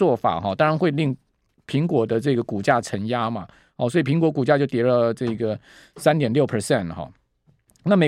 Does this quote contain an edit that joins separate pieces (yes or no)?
no